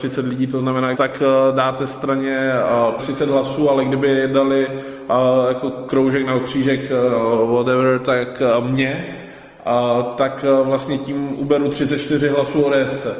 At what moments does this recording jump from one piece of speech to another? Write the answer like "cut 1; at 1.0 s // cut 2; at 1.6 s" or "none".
cut 1; at 0.9 s // cut 2; at 3.0 s